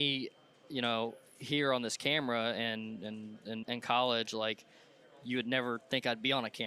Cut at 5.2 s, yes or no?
no